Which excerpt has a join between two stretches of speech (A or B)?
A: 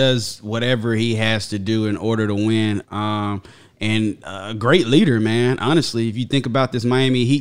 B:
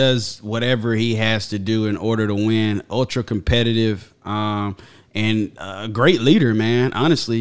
A